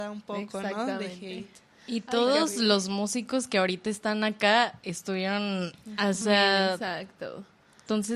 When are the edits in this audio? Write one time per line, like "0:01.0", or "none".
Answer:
0:06.2